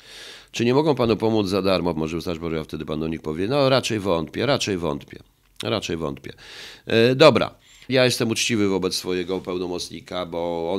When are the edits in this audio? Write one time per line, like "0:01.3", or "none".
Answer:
0:02.0
0:07.9